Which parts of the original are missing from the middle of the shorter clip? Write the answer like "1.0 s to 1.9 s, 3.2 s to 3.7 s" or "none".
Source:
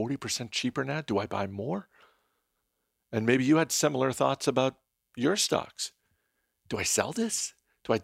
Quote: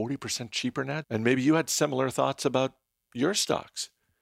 1.0 s to 3.0 s

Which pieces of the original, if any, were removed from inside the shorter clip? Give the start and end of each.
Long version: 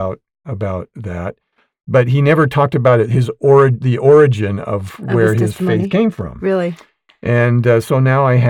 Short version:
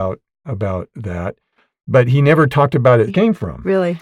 3.1 s to 5.8 s

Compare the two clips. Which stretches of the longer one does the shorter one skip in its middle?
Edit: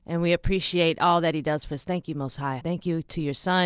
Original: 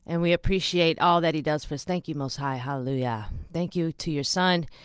2.6 s to 3.5 s

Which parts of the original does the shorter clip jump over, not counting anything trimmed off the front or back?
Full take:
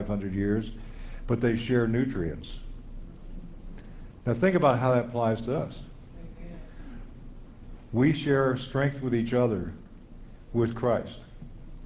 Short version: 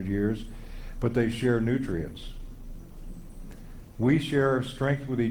4.2 s to 7.9 s

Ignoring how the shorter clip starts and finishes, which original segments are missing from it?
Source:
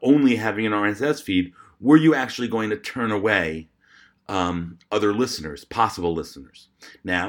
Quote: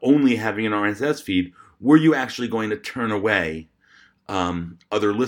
none

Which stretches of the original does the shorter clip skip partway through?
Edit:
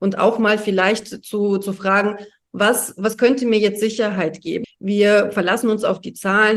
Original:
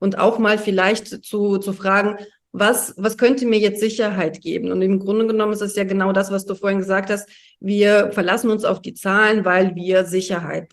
4.6 s to 7.4 s

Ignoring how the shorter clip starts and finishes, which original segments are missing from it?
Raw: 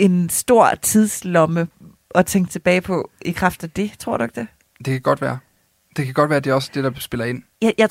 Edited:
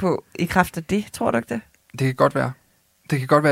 none

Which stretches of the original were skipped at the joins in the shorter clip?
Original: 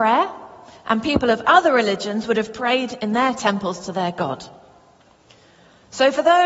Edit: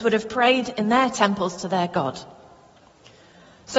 none

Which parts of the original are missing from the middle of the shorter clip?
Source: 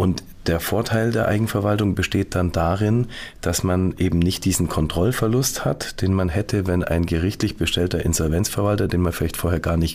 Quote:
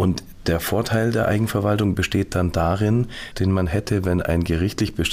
3.3 s to 5.9 s

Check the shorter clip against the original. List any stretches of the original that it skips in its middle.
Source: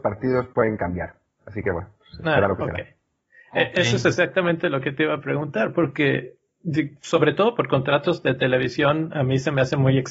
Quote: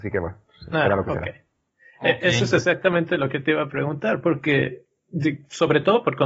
none

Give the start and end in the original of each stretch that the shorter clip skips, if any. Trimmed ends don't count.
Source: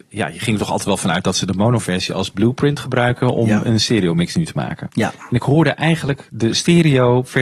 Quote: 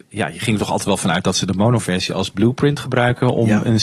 none

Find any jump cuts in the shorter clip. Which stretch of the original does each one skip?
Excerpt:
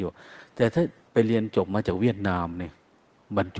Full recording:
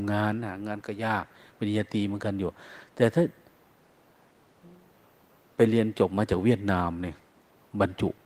3.4 s to 5.4 s

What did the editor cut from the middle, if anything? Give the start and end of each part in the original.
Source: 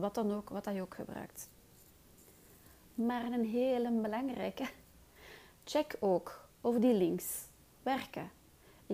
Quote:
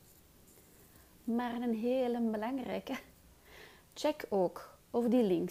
none

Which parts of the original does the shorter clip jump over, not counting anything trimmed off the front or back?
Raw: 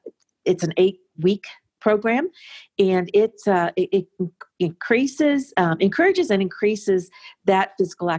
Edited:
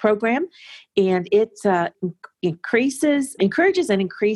3.7 s to 4.1 s, 5.5 s to 5.8 s

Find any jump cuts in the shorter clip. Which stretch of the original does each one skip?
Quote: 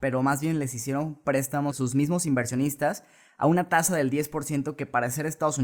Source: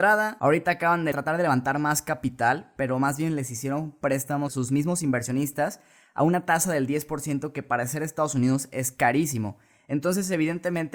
none

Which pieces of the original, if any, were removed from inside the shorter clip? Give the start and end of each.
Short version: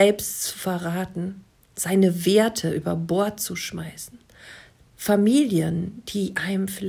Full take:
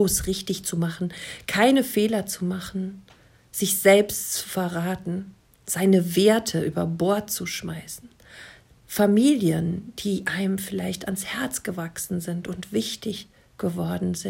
none

